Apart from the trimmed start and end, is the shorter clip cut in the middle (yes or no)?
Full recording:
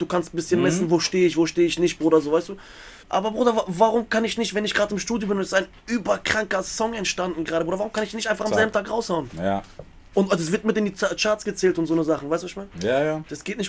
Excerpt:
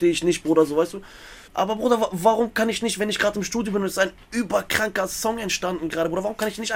no